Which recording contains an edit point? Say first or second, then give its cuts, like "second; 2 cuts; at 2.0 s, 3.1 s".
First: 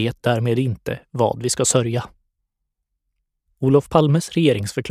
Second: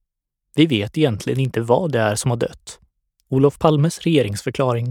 second; 1 cut; at 3.2 s